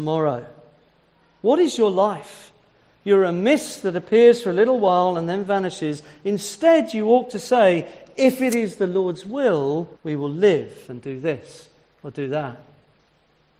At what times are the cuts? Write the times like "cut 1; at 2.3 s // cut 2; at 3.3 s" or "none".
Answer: cut 1; at 10.0 s